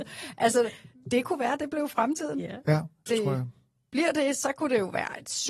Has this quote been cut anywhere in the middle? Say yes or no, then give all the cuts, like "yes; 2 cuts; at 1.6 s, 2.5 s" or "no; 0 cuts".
yes; 1 cut; at 3.1 s